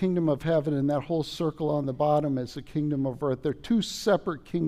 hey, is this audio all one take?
yes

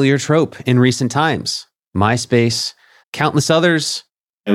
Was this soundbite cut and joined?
yes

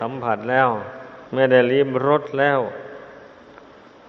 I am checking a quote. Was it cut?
yes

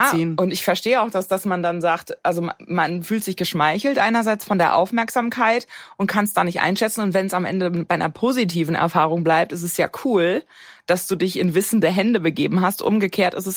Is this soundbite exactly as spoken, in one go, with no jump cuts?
yes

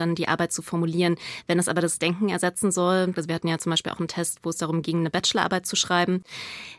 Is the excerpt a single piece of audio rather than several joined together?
no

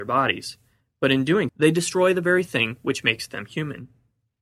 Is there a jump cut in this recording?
yes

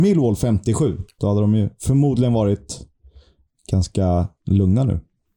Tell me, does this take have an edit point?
yes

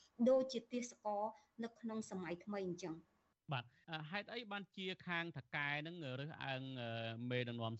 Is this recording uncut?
yes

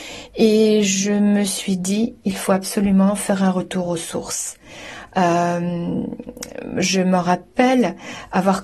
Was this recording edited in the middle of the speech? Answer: no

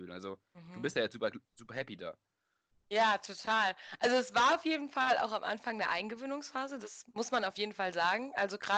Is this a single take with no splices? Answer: yes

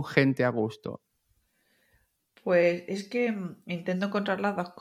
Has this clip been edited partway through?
no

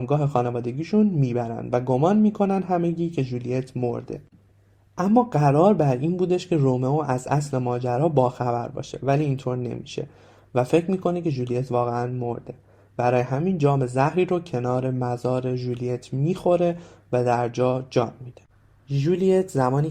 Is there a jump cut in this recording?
no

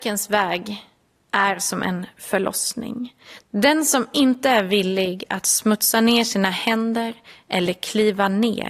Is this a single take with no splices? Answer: no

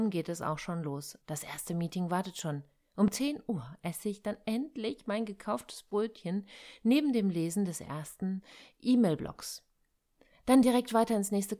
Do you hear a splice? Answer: yes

